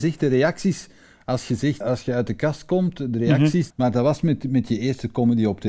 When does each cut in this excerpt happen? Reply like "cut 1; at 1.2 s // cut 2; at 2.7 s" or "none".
cut 1; at 1.8 s // cut 2; at 3.7 s